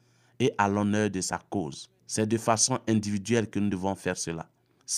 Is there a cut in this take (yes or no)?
yes